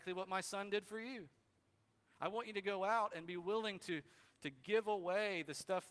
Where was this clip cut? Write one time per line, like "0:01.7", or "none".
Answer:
none